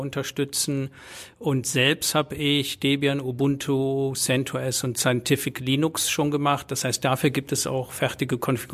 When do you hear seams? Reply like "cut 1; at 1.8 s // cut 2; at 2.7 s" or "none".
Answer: none